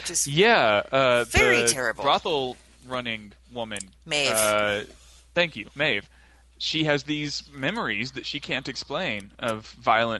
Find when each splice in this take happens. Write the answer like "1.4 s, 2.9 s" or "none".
none